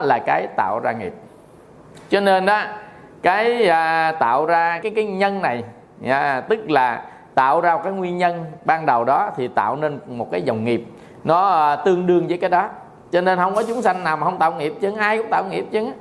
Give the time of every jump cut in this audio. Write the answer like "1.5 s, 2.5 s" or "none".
4.8 s